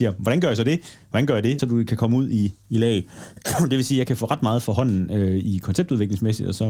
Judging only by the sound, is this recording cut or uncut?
cut